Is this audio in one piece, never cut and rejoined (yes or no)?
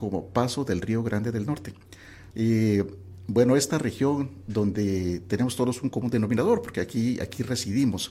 no